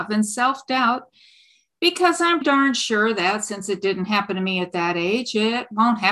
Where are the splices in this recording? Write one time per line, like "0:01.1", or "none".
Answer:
0:02.4